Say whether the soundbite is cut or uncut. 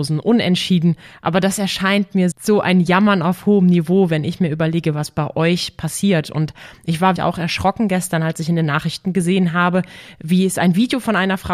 cut